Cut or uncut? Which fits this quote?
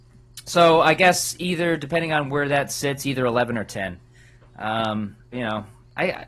cut